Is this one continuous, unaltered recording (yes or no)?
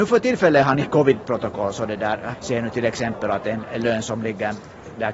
no